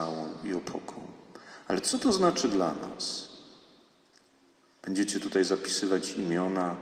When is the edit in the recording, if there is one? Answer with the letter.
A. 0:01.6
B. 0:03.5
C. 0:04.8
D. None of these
D